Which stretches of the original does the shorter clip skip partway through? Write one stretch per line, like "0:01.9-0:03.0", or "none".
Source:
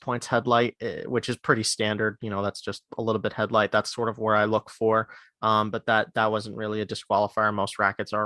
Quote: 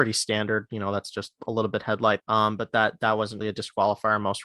0:03.7-0:05.3
0:06.5-0:06.7